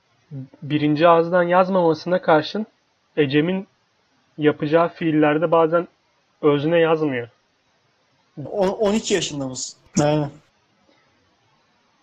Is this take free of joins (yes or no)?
no